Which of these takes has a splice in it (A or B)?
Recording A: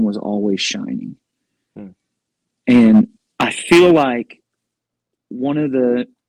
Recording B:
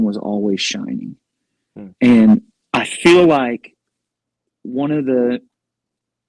B